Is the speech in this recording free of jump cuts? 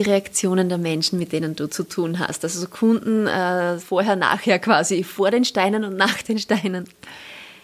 no; 1 cut; at 3.8 s

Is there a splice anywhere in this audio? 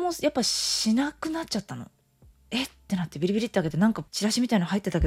yes; 1 cut; at 4.1 s

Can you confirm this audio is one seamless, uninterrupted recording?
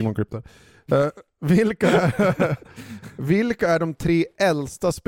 yes; 0 cuts

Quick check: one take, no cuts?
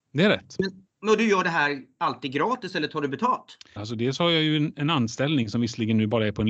no; 1 cut; at 3.8 s

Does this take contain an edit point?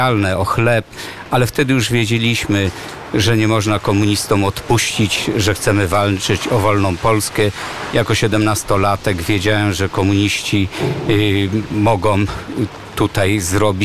yes; 1 cut; at 7.9 s

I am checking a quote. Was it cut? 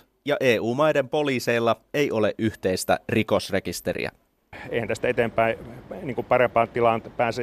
no; 0 cuts

